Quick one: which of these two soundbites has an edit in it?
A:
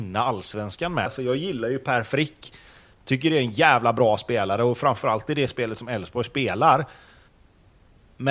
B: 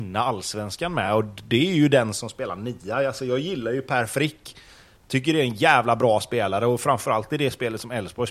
A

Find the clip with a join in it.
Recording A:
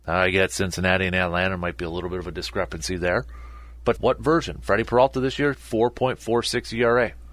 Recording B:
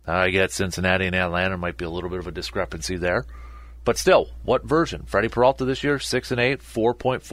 A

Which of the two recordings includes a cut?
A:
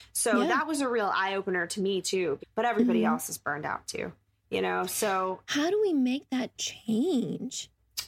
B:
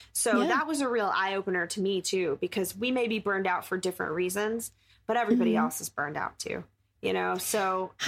A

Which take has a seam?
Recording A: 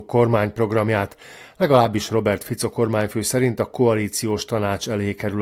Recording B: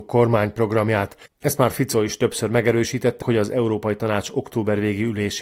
B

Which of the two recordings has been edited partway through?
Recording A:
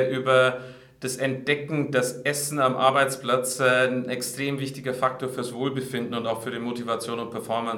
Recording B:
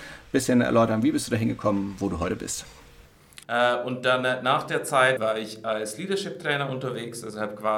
B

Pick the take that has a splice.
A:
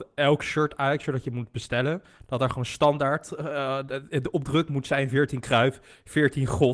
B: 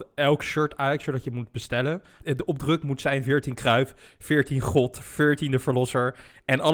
B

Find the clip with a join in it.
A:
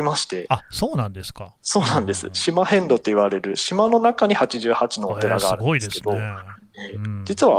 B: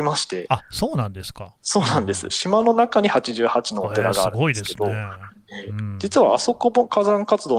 B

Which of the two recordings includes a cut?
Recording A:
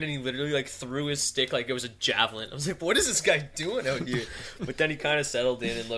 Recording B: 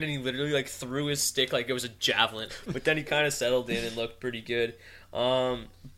B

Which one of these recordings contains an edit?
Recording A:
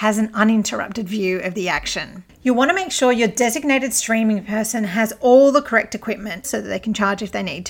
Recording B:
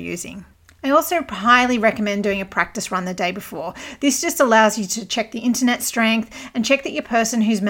A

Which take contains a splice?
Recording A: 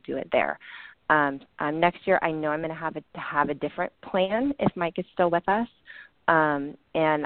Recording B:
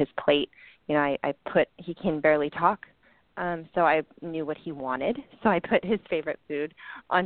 A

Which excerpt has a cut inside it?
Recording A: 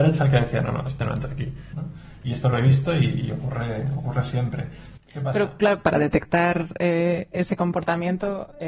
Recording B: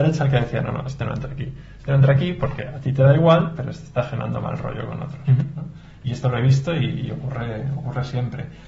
A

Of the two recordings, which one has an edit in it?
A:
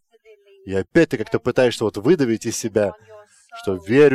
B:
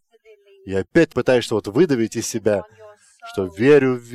B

